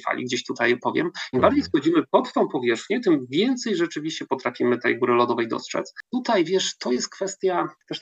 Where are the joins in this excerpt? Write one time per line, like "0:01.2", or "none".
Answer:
0:01.3
0:06.0